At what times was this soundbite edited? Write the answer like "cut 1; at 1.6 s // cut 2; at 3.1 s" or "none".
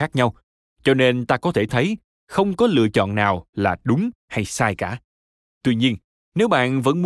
none